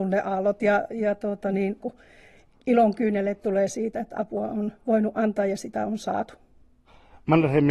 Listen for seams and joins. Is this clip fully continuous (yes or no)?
no